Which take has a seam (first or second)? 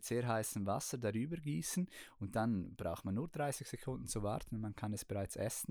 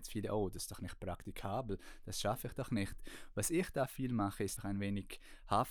second